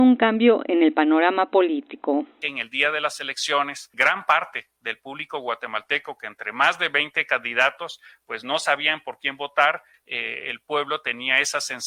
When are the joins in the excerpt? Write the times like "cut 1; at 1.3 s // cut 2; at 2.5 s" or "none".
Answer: none